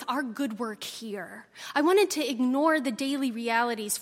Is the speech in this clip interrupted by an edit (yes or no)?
no